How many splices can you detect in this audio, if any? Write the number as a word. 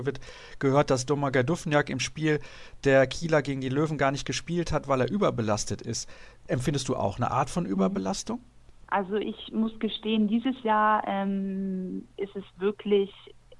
zero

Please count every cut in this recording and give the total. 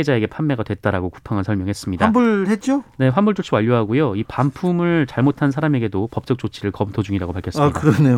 zero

